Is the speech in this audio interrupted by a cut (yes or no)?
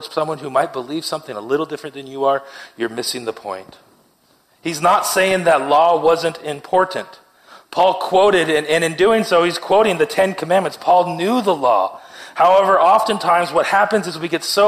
no